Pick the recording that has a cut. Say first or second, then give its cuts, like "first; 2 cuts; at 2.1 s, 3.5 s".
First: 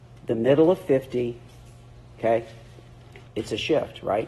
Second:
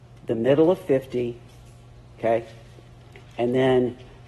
first; 1 cut; at 3.3 s